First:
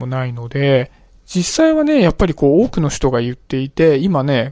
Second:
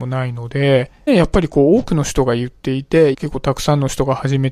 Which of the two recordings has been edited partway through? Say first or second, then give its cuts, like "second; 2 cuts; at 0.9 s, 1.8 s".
second; 2 cuts; at 1.1 s, 3.1 s